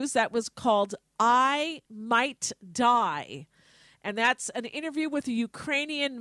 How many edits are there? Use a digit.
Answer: 0